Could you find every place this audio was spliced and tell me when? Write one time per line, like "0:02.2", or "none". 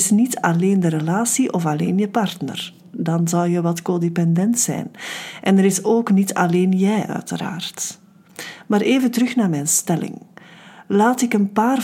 none